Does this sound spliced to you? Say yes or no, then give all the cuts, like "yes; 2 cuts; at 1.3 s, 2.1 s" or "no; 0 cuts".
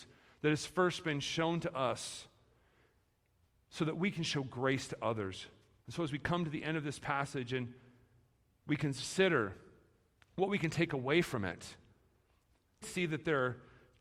yes; 2 cuts; at 5.8 s, 12.8 s